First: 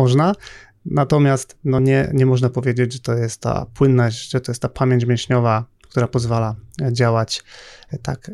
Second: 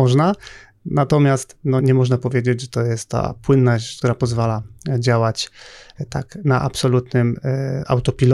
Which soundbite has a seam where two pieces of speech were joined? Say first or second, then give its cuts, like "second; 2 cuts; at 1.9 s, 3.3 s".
second; 2 cuts; at 1.8 s, 4.0 s